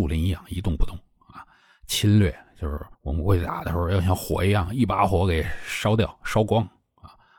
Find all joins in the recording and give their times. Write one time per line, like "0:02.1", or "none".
0:02.9

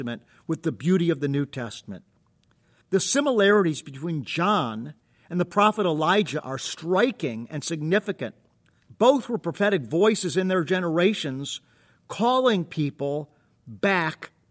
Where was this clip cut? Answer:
0:02.8

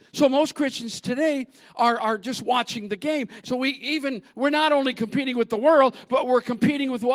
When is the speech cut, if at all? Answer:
0:03.4

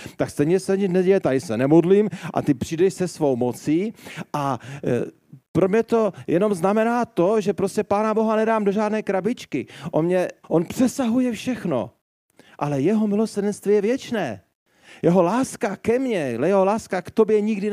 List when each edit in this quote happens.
0:10.4

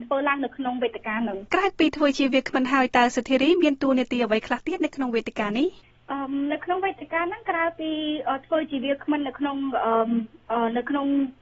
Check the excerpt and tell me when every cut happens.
0:01.5

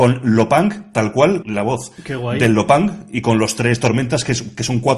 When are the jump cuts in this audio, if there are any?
0:01.4

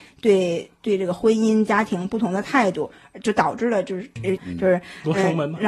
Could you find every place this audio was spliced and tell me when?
0:04.4

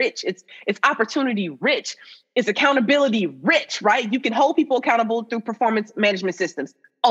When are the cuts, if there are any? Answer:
none

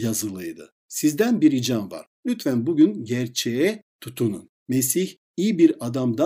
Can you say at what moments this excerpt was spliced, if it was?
0:04.6

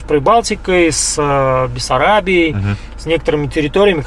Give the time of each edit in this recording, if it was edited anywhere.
none

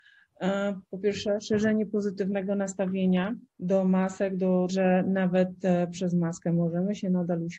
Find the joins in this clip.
0:03.5
0:04.7

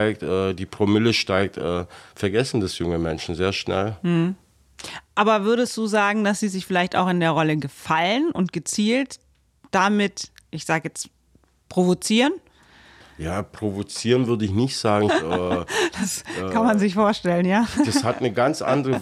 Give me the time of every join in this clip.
0:15.1

